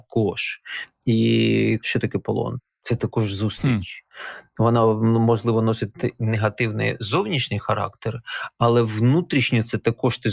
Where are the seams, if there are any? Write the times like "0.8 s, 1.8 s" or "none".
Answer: none